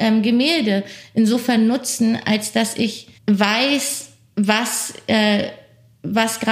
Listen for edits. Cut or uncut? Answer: cut